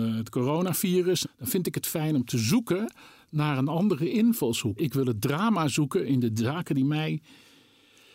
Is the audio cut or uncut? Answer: cut